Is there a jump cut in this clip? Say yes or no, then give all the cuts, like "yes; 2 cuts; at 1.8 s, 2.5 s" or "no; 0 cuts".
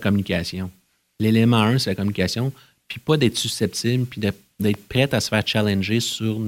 no; 0 cuts